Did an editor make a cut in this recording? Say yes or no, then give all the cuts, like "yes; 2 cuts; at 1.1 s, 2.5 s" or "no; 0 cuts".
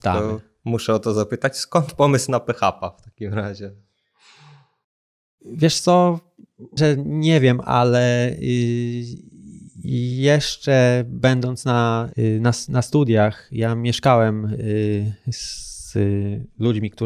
yes; 1 cut; at 6.8 s